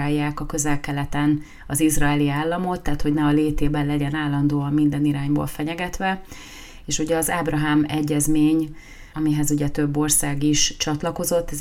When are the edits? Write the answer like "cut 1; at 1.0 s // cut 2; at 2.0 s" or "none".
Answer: cut 1; at 9.1 s